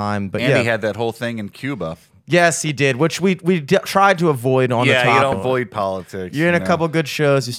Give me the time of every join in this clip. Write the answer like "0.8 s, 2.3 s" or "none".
5.3 s